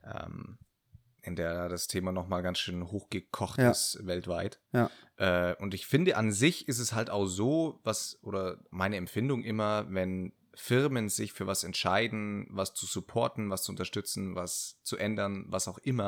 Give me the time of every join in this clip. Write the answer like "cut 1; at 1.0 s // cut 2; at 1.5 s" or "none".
none